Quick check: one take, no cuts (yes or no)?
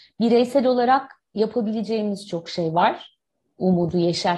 yes